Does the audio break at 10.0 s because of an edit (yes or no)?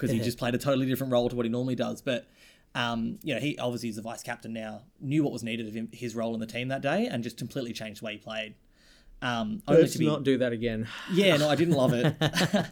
no